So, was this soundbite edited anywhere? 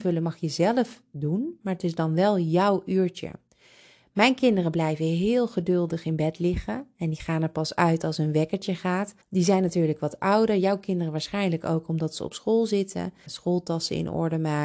yes; 2 cuts; at 9.2 s, 13.3 s

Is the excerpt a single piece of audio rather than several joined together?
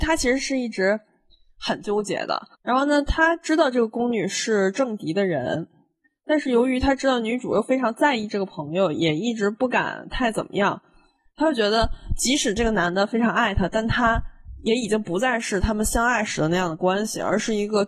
no; 2 cuts; at 2.6 s, 11.3 s

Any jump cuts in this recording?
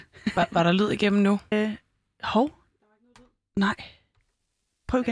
yes; 1 cut; at 1.5 s

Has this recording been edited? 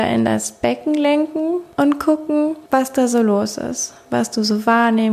no; 0 cuts

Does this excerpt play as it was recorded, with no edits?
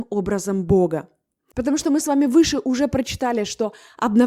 no; 1 cut; at 1.5 s

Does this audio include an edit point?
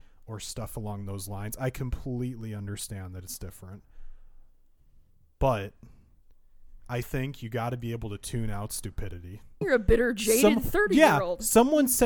yes; 2 cuts; at 7.0 s, 9.6 s

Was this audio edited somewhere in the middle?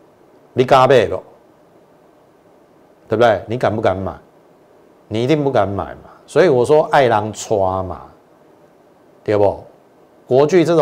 no; 0 cuts

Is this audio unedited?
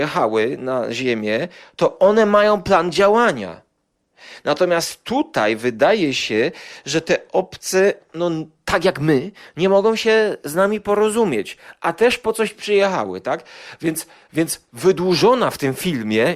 yes; 0 cuts

